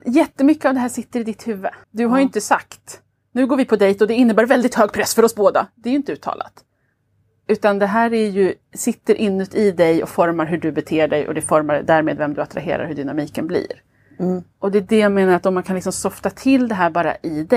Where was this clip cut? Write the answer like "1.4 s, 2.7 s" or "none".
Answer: 1.8 s